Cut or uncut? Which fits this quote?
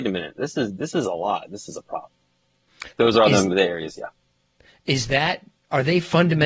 cut